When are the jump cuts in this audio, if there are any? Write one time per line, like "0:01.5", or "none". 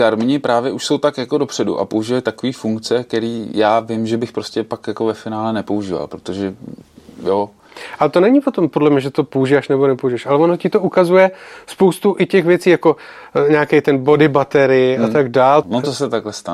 0:15.6